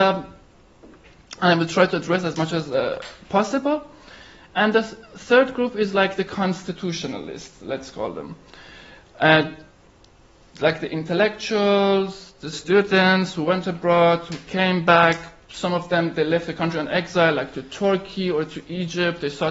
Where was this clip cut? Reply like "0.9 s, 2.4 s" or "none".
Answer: 12.5 s